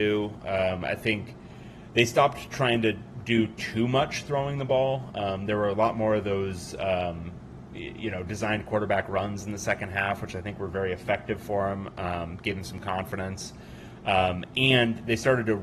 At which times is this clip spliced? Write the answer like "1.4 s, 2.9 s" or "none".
none